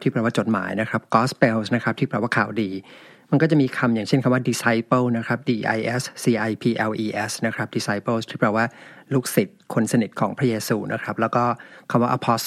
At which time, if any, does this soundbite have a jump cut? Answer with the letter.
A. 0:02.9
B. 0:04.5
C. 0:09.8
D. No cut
D